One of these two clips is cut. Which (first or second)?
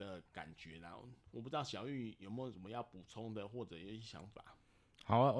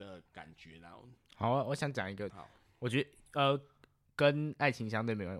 second